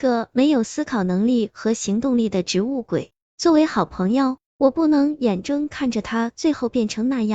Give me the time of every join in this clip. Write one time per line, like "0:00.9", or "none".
0:05.4